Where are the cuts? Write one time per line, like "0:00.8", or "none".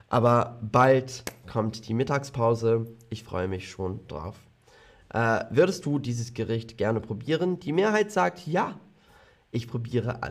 none